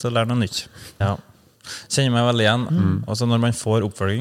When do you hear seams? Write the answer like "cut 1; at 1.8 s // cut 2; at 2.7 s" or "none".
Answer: cut 1; at 1.0 s // cut 2; at 2.7 s